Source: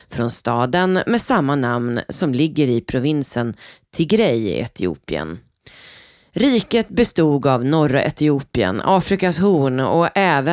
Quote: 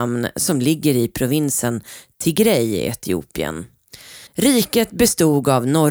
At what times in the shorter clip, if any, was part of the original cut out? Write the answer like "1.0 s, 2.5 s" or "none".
4.3 s